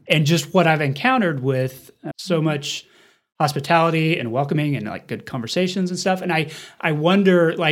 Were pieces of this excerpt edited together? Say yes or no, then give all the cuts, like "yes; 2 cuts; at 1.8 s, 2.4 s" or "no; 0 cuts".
yes; 1 cut; at 2.1 s